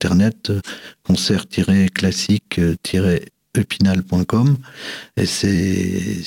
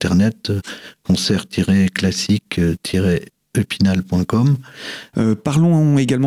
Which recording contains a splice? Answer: second; 1 cut; at 5.1 s

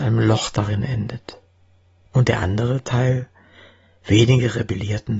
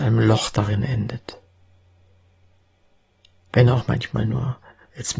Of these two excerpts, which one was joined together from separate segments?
first; 1 cut; at 2.1 s

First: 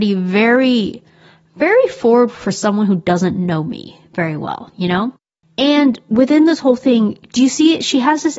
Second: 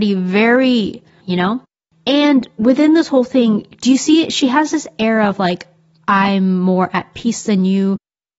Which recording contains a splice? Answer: second; 1 cut; at 1.2 s

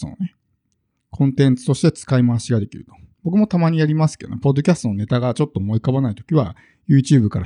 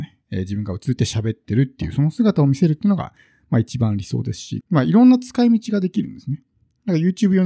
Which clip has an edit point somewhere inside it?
second; 2 cuts; at 1.0 s, 4.6 s

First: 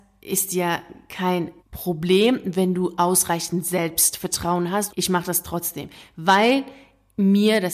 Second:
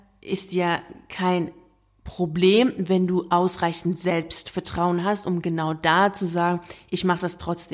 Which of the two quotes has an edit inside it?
first; 2 cuts; at 1.6 s, 4.9 s

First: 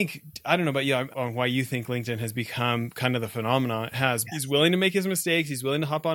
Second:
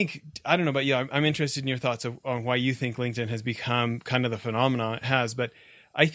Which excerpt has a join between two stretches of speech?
first; 2 cuts; at 1.1 s, 4.2 s

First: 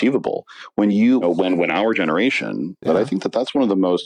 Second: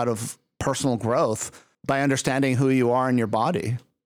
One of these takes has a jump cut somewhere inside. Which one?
first; 2 cuts; at 1.2 s, 2.9 s

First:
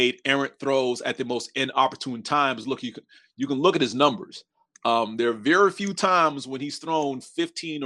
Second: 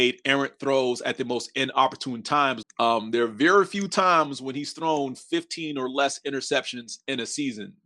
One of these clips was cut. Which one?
second; 1 cut; at 2.6 s

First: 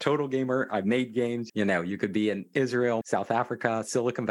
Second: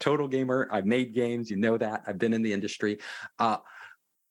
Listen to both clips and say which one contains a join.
first; 2 cuts; at 1.5 s, 3.0 s

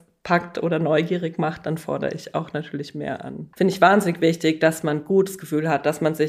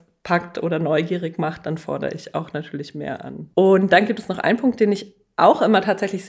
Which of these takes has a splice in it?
first; 1 cut; at 3.5 s

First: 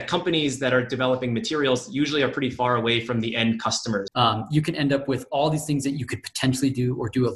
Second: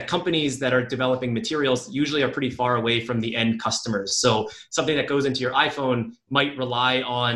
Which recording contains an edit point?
first; 1 cut; at 4.1 s

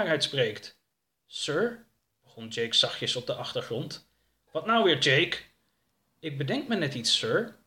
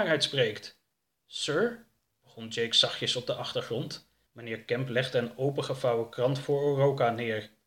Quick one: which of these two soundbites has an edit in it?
second; 1 cut; at 4.3 s

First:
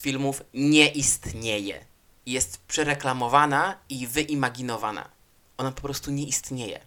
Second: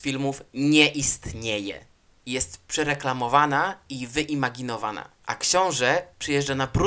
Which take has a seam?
second; 1 cut; at 5.2 s

